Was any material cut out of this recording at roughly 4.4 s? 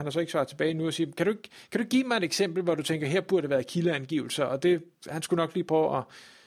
no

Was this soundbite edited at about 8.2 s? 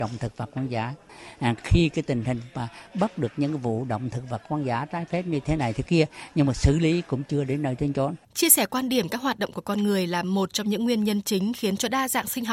yes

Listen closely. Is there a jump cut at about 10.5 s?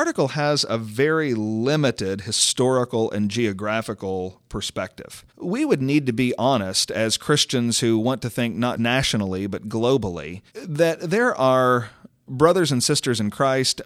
yes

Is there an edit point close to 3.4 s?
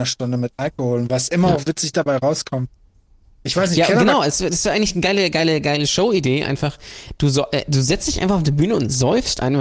no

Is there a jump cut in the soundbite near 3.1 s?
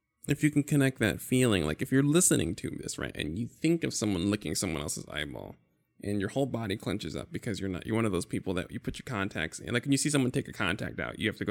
yes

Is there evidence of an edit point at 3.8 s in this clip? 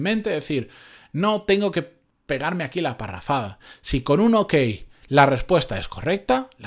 no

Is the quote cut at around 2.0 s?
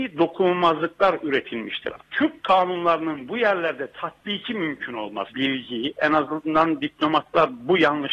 yes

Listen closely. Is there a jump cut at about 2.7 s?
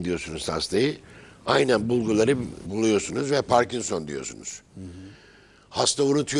yes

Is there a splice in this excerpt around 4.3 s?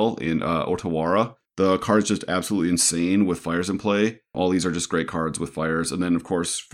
yes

